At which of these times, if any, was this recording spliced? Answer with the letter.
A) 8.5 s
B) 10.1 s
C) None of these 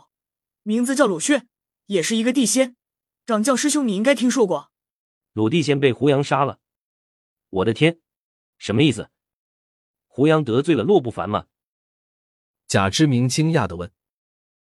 A